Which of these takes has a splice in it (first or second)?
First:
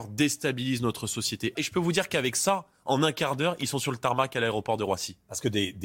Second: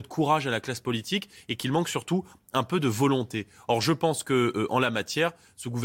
first